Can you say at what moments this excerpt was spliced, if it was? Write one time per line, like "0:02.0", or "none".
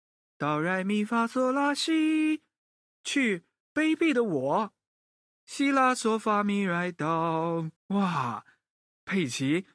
0:05.3
0:07.8